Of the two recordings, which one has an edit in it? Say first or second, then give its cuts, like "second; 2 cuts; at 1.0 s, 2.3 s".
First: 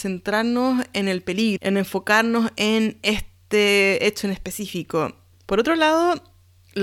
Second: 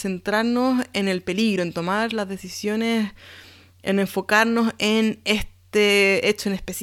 first; 2 cuts; at 1.6 s, 5.3 s